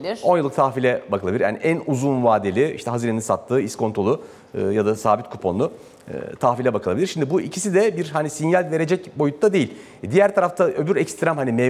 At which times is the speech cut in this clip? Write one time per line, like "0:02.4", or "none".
none

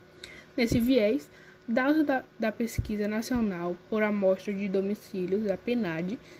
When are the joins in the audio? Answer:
none

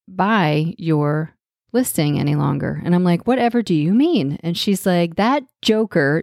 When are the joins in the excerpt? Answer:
none

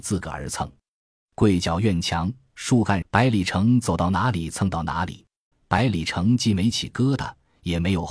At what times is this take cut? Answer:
0:03.0
0:05.5

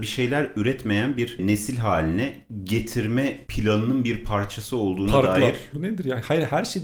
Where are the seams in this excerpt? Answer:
0:05.7

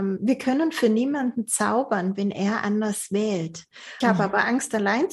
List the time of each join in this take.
0:04.0

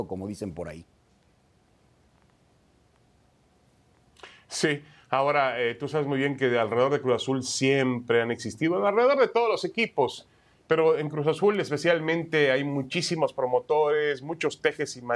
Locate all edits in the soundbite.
none

